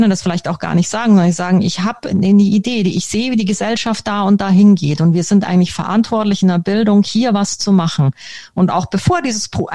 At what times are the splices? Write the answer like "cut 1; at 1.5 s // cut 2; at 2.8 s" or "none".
none

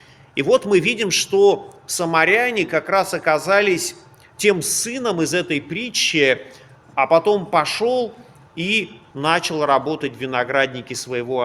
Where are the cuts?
cut 1; at 6.8 s // cut 2; at 9.1 s

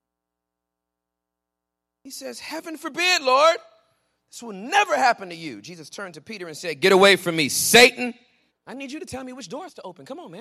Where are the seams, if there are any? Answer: cut 1; at 8.5 s

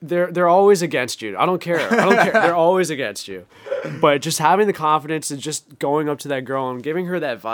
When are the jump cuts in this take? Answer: none

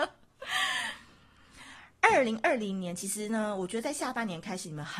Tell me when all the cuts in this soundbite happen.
none

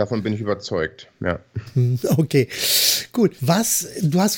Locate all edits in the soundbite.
cut 1; at 3.4 s

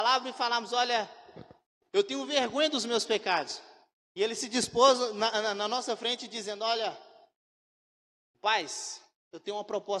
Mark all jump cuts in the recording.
cut 1; at 4.1 s

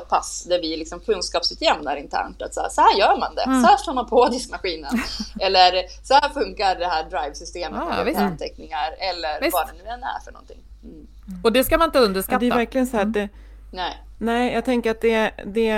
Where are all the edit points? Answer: none

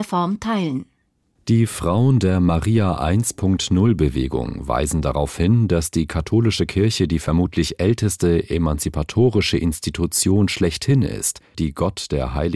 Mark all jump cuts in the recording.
cut 1; at 11.5 s

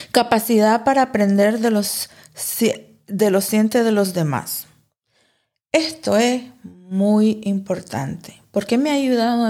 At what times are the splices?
none

